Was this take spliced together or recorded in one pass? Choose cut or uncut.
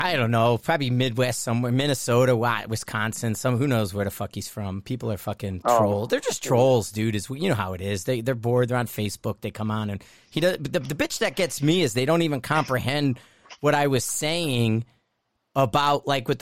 uncut